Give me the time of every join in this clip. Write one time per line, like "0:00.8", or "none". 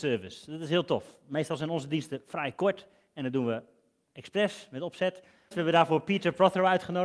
0:05.5